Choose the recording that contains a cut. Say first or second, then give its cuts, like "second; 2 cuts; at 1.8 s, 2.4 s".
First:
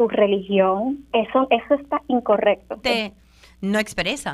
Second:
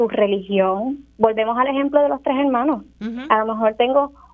first; 2 cuts; at 1.1 s, 2.8 s